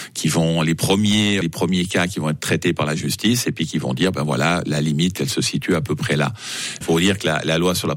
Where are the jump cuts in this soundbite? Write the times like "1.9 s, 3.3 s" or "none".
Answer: 1.4 s, 6.8 s